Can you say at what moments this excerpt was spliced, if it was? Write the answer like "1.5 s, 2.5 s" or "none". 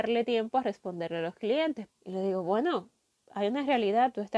1.9 s